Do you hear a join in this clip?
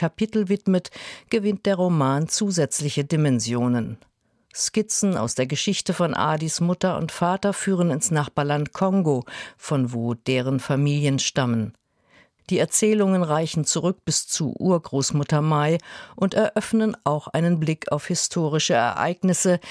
no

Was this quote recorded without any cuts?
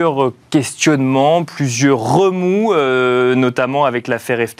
yes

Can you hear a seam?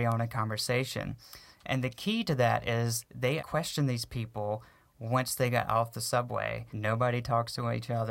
yes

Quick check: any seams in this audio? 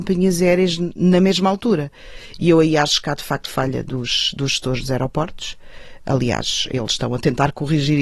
no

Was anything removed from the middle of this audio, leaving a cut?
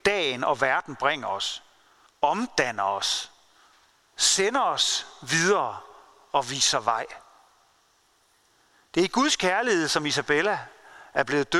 yes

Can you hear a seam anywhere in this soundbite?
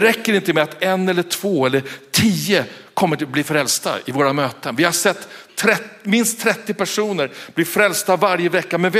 no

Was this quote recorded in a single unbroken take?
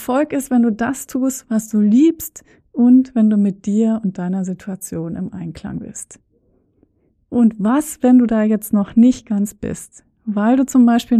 yes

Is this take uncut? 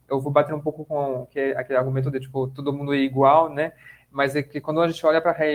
yes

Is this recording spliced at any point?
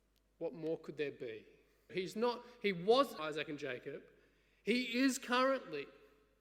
yes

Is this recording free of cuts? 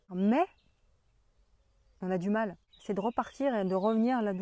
no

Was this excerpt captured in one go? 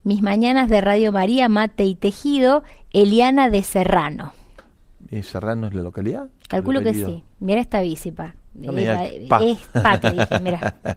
yes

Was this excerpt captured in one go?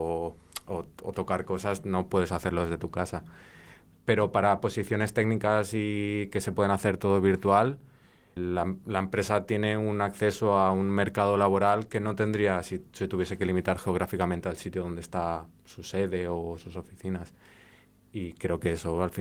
no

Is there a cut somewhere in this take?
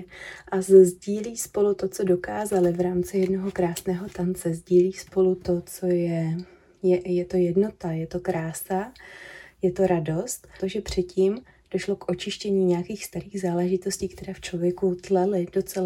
yes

